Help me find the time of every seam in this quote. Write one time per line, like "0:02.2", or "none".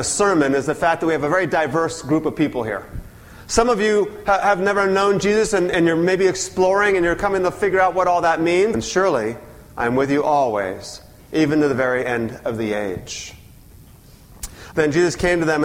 0:08.7
0:14.7